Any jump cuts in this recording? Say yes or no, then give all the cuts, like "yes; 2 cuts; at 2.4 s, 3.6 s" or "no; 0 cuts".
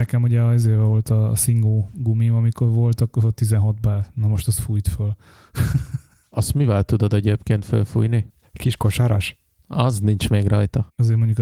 yes; 1 cut; at 8.3 s